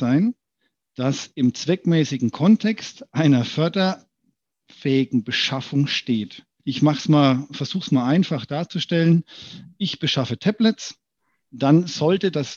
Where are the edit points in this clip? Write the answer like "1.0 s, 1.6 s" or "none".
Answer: 6.6 s